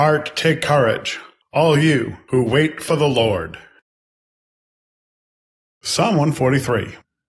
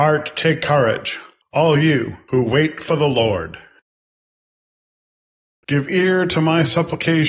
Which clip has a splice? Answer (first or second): second